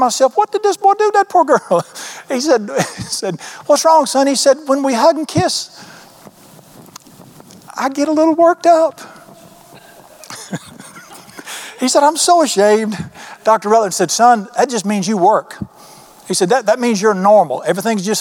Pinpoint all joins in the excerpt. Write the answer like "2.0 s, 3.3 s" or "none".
none